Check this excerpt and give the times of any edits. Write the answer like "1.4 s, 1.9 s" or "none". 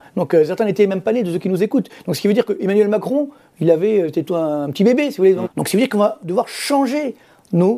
5.4 s